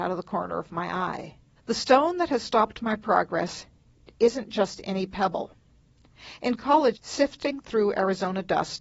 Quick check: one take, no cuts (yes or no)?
no